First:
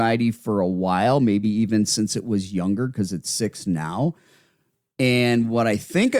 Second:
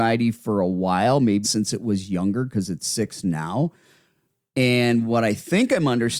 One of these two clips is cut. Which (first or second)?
second